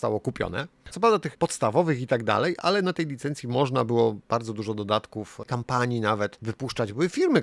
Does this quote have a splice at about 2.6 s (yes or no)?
no